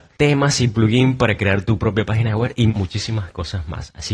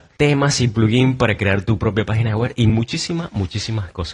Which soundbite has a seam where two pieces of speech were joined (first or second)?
first